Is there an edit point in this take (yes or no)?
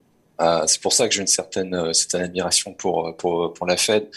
no